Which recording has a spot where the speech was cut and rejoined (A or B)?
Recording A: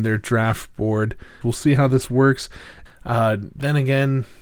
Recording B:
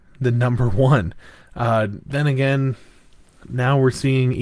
A